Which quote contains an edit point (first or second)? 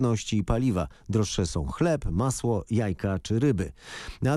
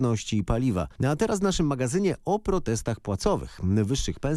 second